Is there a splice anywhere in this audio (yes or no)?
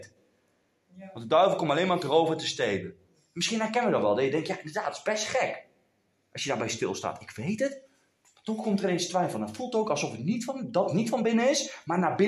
no